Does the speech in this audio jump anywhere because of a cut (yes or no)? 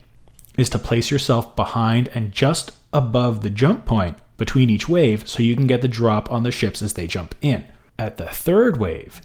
yes